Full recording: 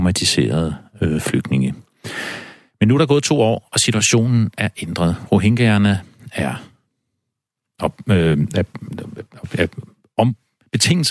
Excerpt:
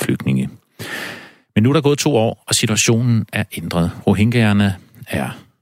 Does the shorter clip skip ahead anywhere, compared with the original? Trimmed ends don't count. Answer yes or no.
no